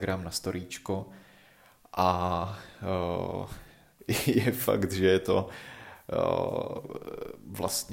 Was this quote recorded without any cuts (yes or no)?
yes